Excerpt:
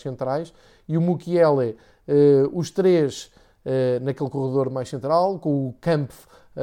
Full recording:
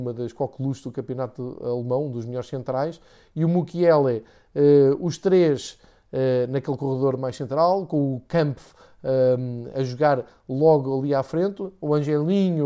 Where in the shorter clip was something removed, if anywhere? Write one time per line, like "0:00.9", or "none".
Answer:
none